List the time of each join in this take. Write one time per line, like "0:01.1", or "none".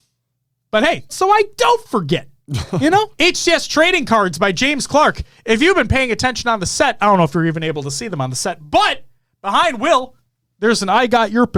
0:01.1
0:03.1